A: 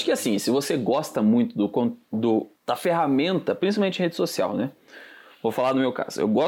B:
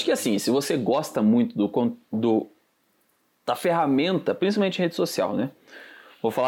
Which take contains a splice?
A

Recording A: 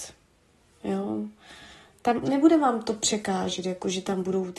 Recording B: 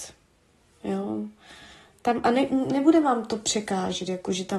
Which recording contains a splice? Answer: A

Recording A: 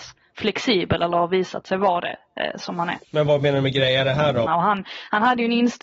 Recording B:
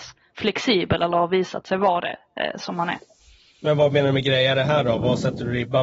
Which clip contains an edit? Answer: A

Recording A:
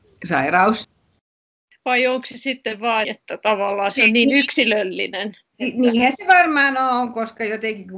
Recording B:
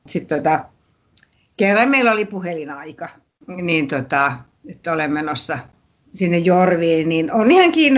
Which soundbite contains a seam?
A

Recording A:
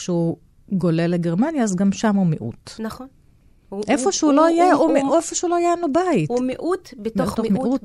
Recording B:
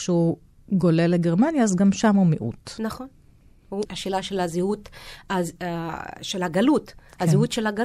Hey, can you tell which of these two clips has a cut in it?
B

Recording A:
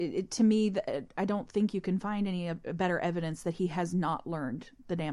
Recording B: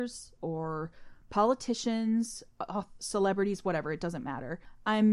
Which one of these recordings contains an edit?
B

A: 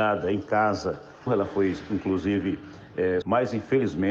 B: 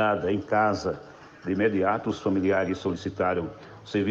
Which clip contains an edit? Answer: A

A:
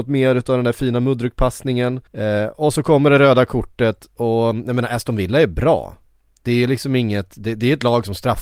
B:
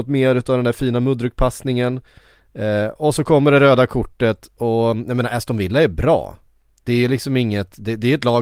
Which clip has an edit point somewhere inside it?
A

